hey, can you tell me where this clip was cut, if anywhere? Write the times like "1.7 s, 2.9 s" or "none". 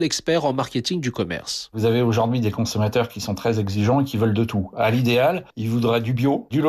none